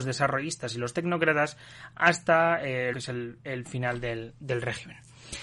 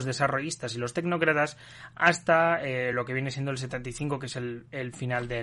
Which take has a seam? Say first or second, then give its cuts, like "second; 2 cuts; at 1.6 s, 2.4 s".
first; 1 cut; at 2.9 s